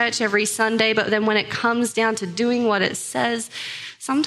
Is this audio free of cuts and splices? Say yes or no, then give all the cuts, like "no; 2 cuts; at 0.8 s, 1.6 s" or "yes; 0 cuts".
yes; 0 cuts